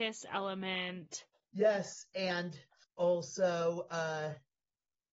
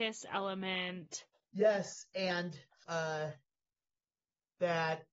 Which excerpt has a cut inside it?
second; 1 cut; at 2.9 s

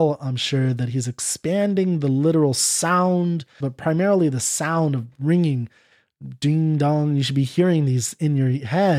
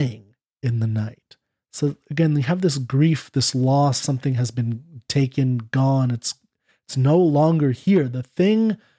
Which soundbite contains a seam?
first; 1 cut; at 3.6 s

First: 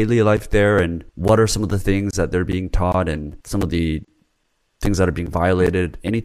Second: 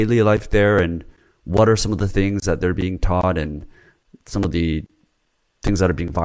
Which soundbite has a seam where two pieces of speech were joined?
first; 2 cuts; at 1.1 s, 3.4 s

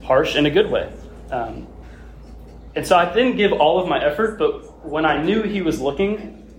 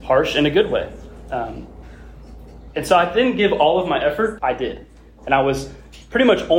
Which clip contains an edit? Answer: second; 1 cut; at 4.4 s

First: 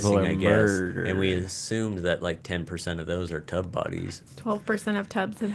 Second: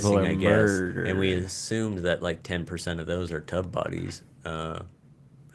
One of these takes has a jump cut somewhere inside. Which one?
first; 1 cut; at 4.3 s

